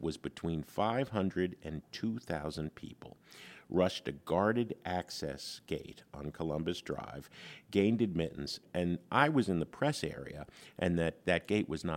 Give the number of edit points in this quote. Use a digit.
0